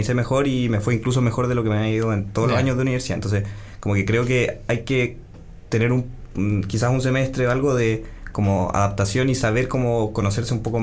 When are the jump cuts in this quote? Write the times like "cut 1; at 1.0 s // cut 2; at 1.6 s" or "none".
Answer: none